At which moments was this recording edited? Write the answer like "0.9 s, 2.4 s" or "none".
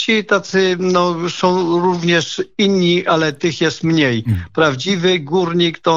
none